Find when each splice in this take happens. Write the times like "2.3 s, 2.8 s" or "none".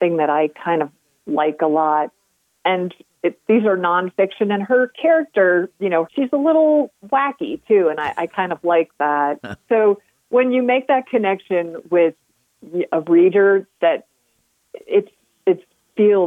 6.0 s, 9.6 s